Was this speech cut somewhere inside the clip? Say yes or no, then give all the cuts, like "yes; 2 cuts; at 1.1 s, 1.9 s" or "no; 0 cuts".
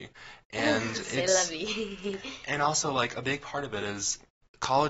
no; 0 cuts